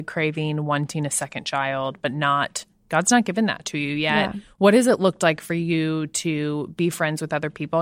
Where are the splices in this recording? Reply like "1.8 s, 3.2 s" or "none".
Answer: none